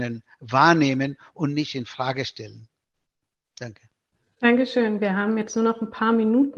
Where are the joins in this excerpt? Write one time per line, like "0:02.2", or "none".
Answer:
none

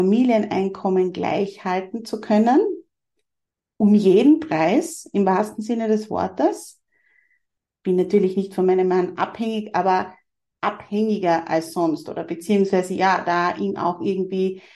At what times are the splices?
0:07.7

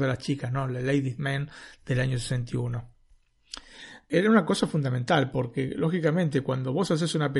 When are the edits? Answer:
none

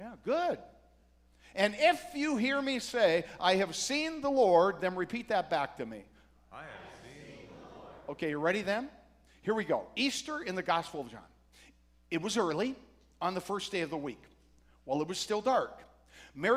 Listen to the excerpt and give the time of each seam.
none

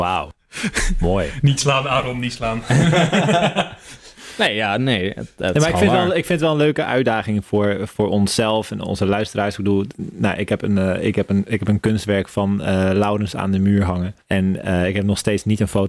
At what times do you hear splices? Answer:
0:14.2

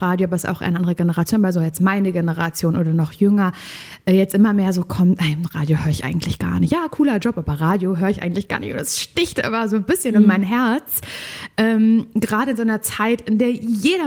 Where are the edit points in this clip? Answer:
none

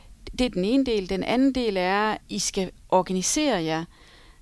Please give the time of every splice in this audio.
0:02.2

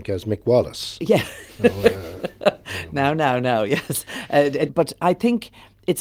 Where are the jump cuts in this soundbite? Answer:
0:04.7

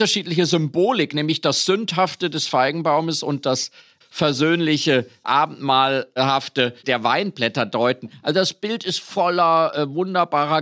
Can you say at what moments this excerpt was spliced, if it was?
none

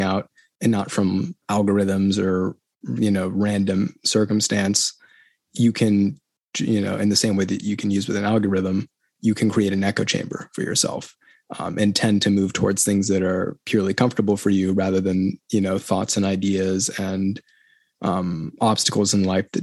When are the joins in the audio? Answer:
0:01.4

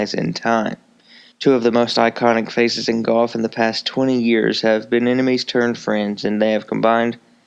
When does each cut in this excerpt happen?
0:01.3

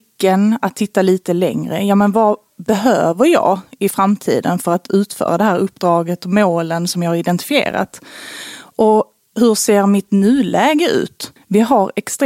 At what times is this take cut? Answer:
0:11.4

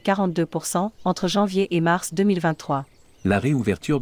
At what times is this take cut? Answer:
0:01.0

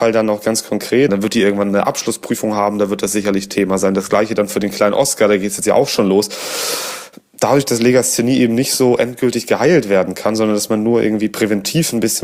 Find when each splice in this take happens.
0:01.1

